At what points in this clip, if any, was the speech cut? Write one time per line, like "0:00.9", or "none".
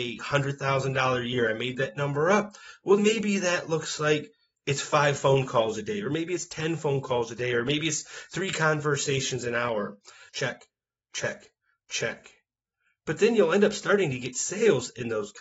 0:03.0
0:10.3

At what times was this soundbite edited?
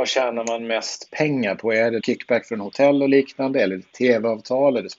0:02.0

